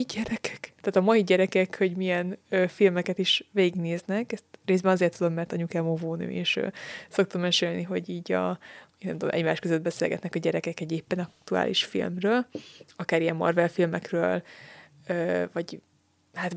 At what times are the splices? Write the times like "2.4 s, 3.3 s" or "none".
none